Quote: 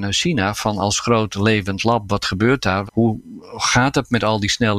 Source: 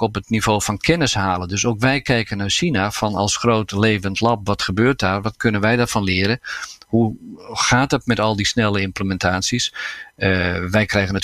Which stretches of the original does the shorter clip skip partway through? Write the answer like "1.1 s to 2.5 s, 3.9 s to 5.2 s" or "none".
5.2 s to 6.8 s

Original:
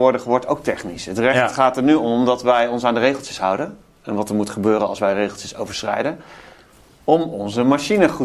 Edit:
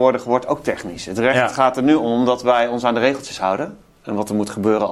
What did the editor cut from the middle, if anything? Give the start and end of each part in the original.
none

